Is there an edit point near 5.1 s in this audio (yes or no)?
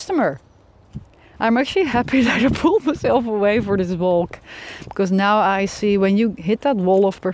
no